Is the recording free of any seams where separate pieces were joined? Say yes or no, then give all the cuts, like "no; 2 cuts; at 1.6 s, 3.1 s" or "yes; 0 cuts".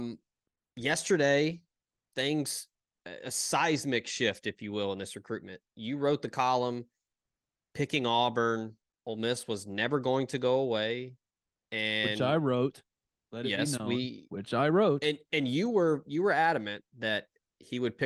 yes; 0 cuts